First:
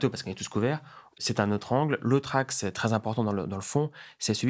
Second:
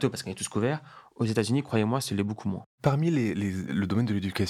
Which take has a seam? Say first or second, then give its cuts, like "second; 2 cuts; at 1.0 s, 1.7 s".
first; 1 cut; at 1.1 s